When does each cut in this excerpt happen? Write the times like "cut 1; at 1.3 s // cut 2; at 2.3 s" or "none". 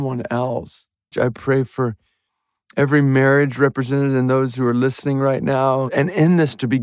cut 1; at 1.1 s // cut 2; at 5.9 s